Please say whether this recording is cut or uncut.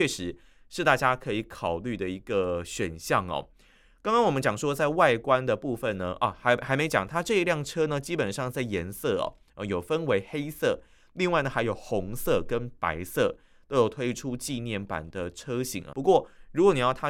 cut